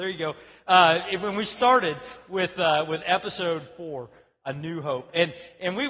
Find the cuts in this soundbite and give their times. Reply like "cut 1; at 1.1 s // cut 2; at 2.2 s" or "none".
none